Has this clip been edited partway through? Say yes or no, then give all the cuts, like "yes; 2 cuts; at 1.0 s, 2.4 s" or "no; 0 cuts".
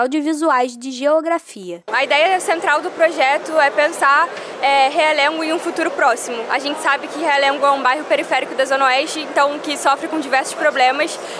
no; 0 cuts